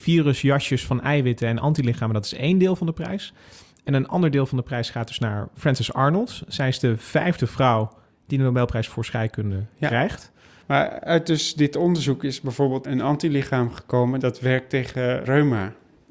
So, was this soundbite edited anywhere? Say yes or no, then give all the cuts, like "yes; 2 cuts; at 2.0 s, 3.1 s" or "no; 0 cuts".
yes; 1 cut; at 10.6 s